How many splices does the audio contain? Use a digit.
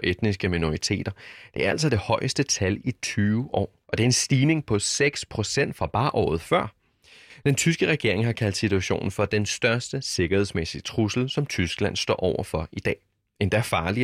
1